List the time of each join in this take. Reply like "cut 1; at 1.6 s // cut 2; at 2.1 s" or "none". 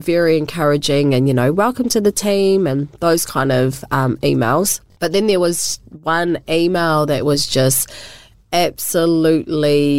none